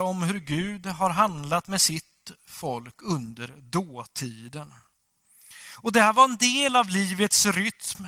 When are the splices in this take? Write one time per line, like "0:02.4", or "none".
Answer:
none